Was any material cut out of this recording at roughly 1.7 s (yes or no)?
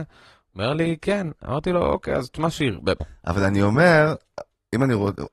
no